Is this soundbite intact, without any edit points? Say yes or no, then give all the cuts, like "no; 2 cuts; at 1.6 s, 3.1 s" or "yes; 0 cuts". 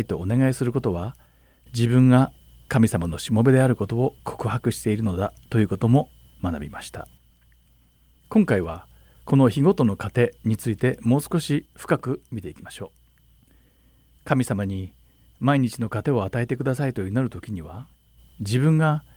yes; 0 cuts